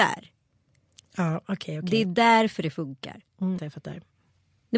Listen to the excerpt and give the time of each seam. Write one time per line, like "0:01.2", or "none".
0:03.6